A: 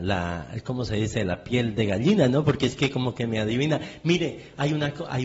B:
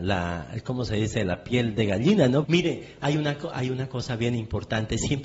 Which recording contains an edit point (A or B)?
B